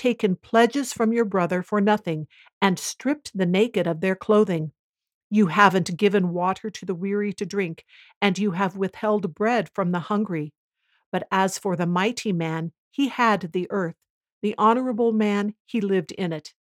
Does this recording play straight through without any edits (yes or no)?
yes